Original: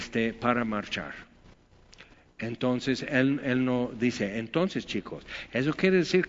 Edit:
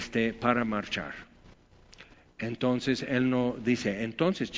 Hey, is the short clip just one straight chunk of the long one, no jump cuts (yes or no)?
no